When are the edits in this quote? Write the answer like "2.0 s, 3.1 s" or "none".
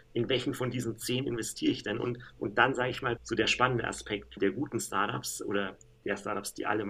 3.2 s, 4.4 s